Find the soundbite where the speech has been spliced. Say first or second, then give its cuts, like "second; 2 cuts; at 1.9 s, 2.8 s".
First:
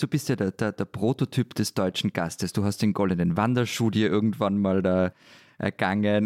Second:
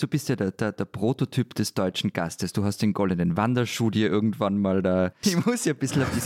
second; 1 cut; at 5.2 s